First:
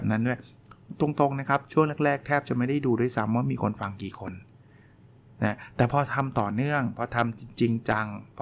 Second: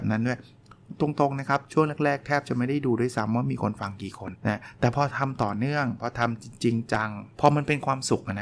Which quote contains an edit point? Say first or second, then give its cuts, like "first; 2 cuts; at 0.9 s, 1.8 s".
second; 2 cuts; at 4.3 s, 7.3 s